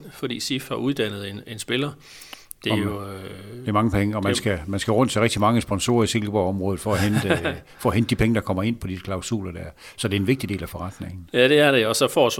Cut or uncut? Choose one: uncut